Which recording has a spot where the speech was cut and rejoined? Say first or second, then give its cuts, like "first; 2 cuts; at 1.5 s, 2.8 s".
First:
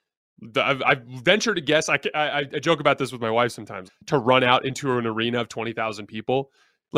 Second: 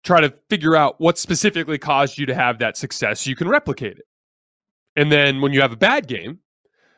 first; 1 cut; at 3.9 s